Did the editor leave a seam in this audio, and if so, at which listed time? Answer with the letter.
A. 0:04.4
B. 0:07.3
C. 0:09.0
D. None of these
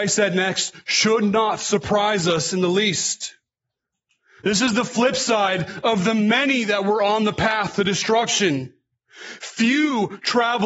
A